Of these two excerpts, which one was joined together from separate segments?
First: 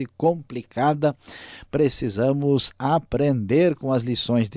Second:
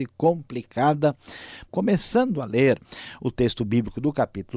second; 1 cut; at 1.7 s

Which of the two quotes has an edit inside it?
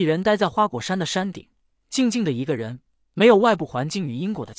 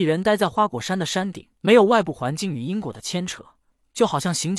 second; 1 cut; at 1.6 s

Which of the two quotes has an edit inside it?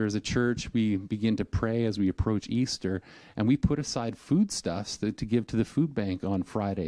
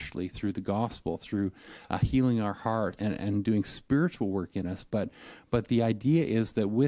second; 1 cut; at 3.0 s

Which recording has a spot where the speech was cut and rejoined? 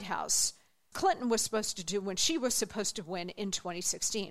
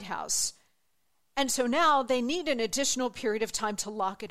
first; 1 cut; at 0.9 s

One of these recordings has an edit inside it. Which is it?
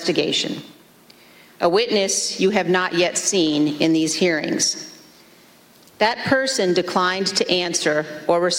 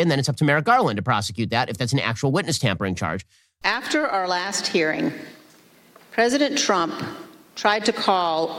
second; 1 cut; at 3.6 s

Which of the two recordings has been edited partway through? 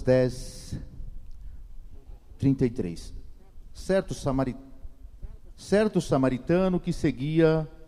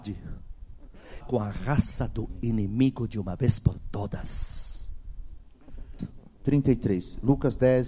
second; 2 cuts; at 1.2 s, 6.0 s

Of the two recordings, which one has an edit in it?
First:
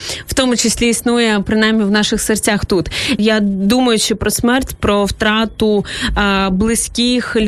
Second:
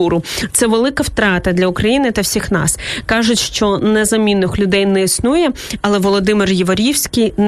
first; 1 cut; at 3.2 s

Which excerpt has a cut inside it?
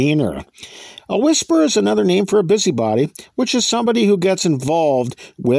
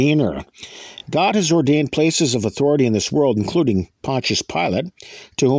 first; 1 cut; at 1.0 s

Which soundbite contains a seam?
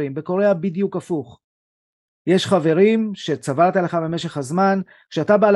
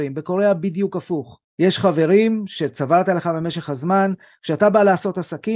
second; 1 cut; at 1.5 s

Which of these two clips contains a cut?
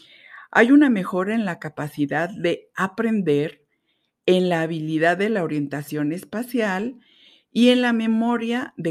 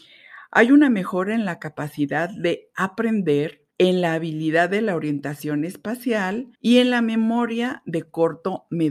second; 2 cuts; at 3.7 s, 6.5 s

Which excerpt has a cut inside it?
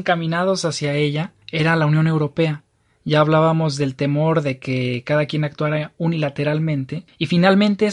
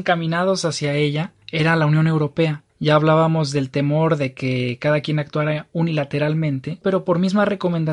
second; 2 cuts; at 2.7 s, 6.8 s

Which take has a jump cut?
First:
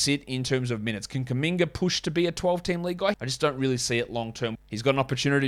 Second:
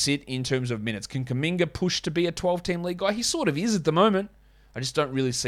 first; 2 cuts; at 3.1 s, 4.6 s

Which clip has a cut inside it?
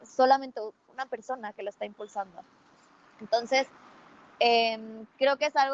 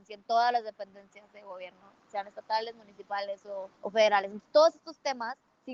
second; 1 cut; at 3.7 s

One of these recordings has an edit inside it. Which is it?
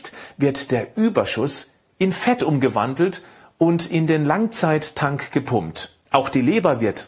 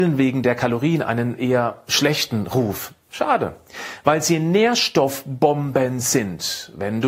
first; 1 cut; at 6.0 s

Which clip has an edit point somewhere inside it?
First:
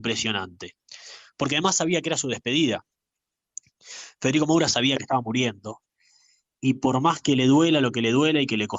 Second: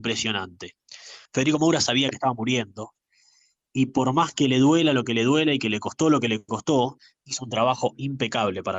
second; 1 cut; at 1.3 s

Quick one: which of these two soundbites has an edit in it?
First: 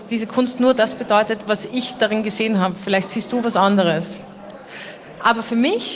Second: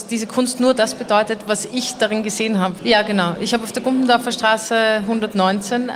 second; 1 cut; at 2.8 s

